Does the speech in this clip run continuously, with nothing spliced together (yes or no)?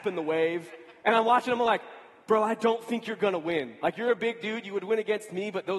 yes